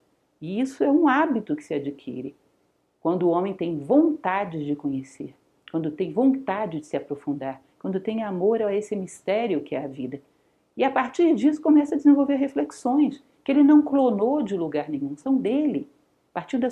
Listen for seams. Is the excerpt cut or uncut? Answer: uncut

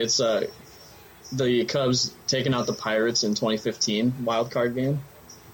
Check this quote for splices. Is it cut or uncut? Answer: uncut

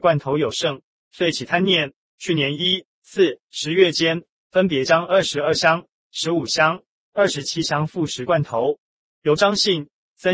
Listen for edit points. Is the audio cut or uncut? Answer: uncut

